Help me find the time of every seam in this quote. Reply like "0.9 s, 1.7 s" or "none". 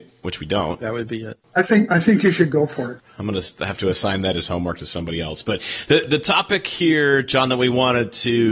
1.5 s, 3.0 s

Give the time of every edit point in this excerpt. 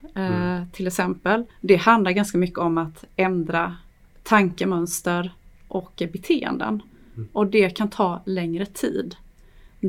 1.5 s

